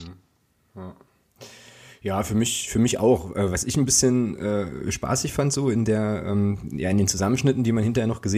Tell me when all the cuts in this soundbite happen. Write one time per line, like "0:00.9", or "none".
none